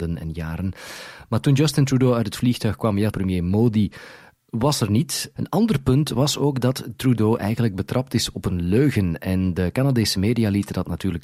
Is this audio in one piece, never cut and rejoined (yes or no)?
no